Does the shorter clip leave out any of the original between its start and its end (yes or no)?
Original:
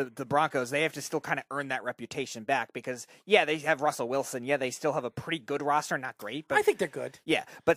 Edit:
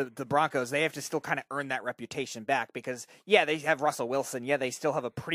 no